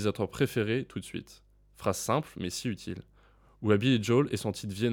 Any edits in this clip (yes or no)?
no